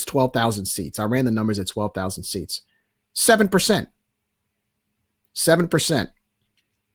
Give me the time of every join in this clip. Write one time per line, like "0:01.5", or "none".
none